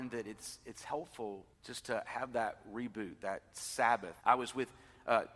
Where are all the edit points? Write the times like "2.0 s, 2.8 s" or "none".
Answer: 1.5 s, 4.2 s